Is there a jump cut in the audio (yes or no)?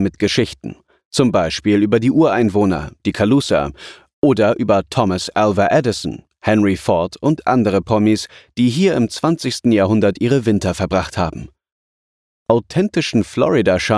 no